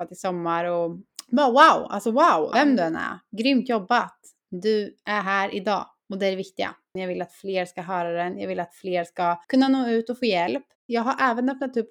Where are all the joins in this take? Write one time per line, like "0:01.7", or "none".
0:02.5
0:07.0
0:09.4